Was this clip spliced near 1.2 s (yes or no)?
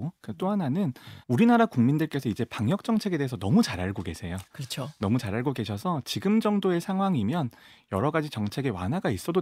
yes